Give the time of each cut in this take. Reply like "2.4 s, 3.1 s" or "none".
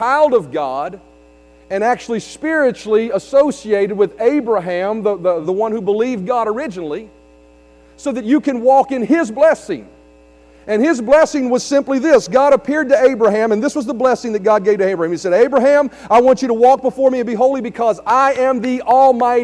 5.4 s